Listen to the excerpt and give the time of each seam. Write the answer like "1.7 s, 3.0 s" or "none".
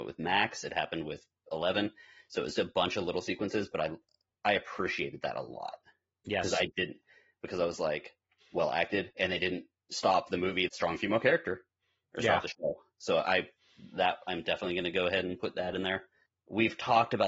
8.4 s, 10.7 s